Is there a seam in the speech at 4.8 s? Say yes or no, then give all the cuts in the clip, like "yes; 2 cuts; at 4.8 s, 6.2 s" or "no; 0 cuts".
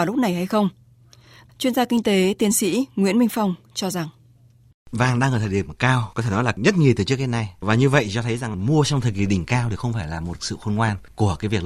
no; 1 cut; at 1.5 s